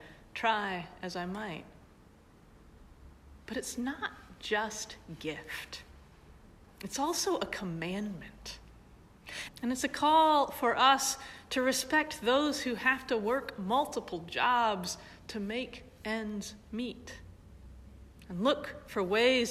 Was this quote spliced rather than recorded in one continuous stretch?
yes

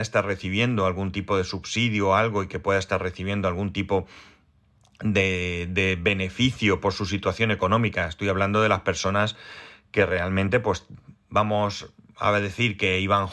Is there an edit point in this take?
no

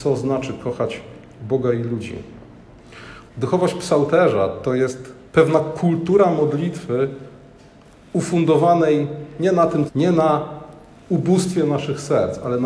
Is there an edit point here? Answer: yes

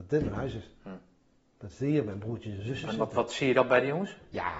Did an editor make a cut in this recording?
no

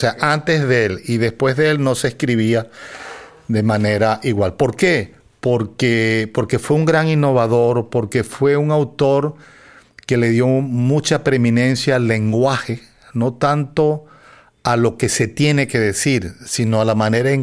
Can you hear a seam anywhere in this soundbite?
no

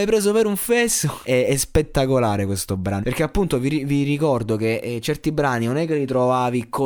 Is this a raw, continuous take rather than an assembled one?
no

